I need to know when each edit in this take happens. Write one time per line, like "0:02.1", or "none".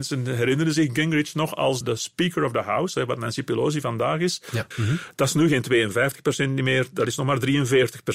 0:01.8
0:04.7